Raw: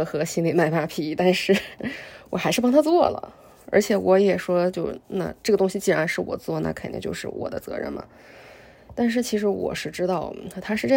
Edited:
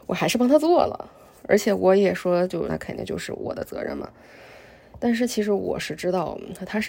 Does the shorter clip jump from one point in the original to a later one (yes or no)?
yes